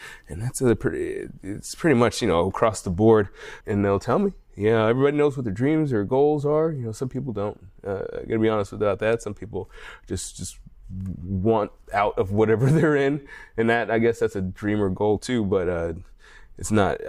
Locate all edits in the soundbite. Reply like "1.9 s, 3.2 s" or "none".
3.6 s